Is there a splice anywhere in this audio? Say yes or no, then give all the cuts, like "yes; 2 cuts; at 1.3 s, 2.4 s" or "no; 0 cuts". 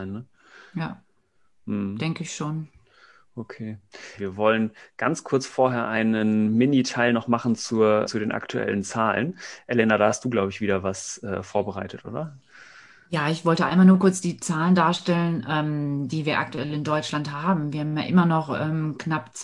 yes; 2 cuts; at 4.2 s, 8.1 s